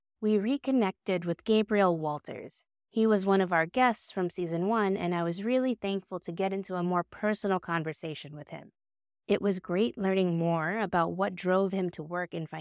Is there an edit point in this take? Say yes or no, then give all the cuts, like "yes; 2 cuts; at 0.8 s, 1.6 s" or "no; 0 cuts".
yes; 2 cuts; at 2.9 s, 9.1 s